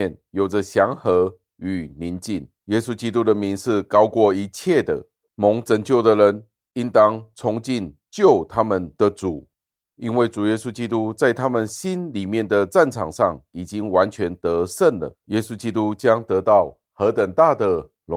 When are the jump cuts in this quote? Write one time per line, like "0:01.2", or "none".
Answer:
0:05.3
0:15.2